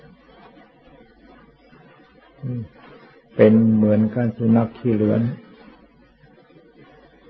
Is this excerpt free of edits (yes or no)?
yes